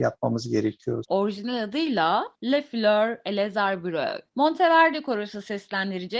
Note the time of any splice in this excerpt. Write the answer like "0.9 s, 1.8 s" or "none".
1.0 s